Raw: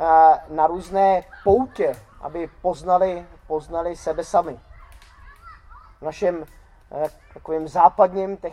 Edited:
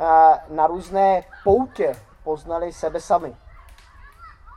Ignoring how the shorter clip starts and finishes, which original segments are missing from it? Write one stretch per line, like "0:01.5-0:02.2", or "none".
0:02.1-0:03.3